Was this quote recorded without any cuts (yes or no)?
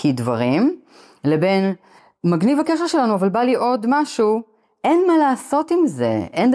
yes